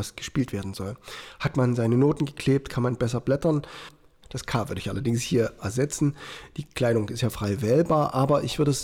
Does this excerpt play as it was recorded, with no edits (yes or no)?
no